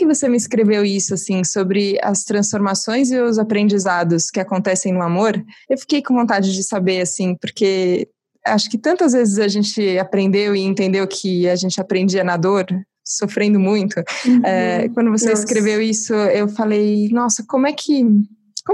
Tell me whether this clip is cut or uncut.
uncut